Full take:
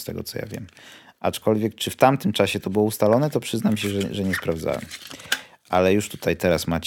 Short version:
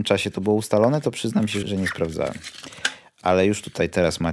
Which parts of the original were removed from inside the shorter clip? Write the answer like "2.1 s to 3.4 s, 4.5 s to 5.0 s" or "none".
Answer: 3.9 s to 4.1 s